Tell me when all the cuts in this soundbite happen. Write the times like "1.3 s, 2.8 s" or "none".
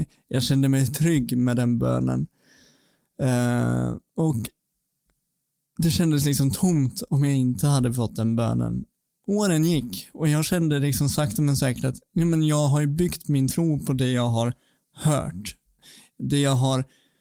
none